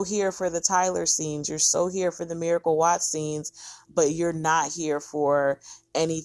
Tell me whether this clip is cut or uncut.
cut